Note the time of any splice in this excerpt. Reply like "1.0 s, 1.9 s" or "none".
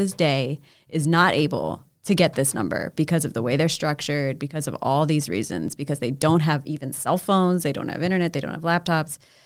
none